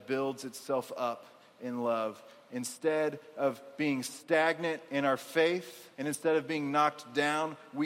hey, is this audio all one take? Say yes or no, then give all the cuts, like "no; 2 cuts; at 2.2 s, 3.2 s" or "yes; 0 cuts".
no; 1 cut; at 5.9 s